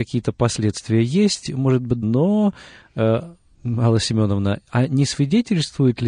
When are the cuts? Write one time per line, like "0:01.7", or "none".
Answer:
0:02.0